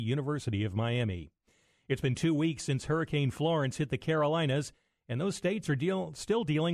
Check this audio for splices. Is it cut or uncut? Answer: uncut